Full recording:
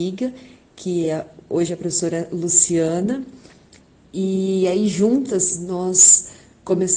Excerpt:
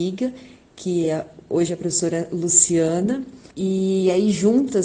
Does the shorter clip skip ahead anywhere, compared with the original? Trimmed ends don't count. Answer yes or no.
yes